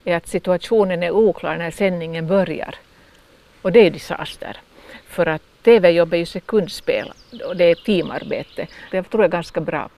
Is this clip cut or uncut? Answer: cut